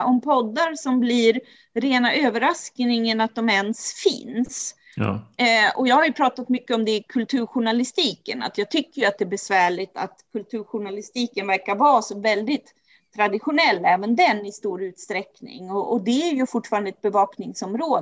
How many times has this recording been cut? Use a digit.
0